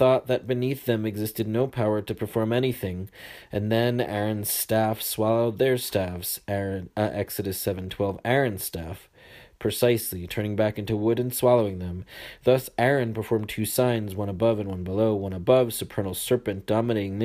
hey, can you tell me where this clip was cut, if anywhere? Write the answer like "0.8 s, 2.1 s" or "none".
none